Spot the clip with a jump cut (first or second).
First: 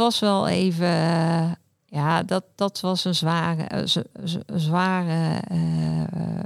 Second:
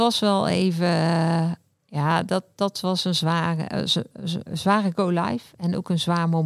second